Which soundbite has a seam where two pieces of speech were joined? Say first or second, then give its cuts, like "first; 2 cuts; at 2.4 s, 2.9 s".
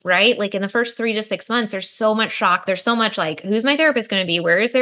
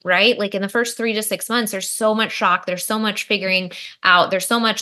first; 1 cut; at 2.7 s